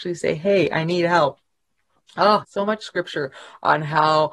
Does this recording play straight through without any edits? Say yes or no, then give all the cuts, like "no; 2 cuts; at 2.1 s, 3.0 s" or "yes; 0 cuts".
no; 1 cut; at 2.4 s